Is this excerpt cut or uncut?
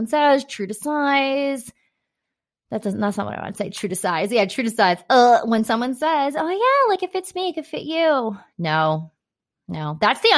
uncut